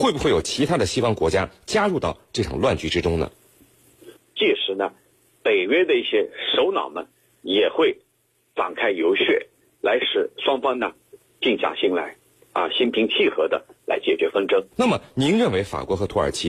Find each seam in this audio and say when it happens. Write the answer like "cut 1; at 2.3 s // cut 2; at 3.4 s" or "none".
cut 1; at 4.2 s // cut 2; at 14.7 s